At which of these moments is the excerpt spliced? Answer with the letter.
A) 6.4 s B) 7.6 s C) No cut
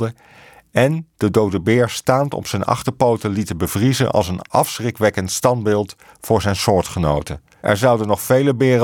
B